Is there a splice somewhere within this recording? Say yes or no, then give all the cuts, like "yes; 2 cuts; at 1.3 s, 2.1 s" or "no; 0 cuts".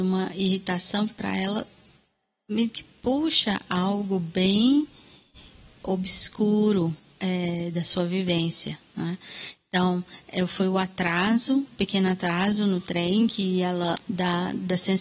no; 0 cuts